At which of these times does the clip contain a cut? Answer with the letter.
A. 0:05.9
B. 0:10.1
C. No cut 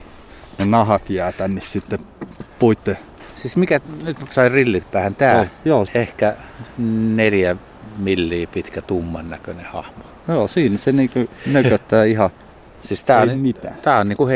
A